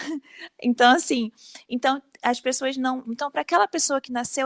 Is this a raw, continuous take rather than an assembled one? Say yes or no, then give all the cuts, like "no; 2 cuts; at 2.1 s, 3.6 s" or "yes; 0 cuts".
no; 1 cut; at 3.0 s